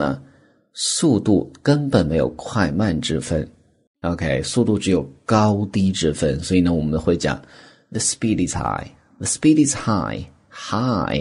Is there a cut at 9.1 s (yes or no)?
no